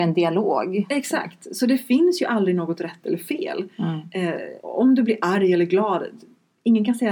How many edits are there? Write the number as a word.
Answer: one